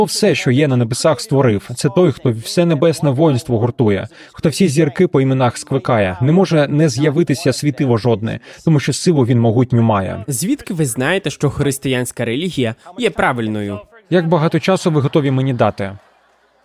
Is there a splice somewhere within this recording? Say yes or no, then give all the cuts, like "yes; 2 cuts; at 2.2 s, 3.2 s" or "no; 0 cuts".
no; 0 cuts